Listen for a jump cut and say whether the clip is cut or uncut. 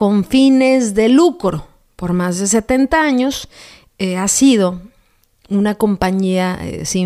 uncut